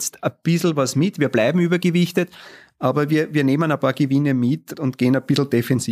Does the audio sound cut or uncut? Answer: cut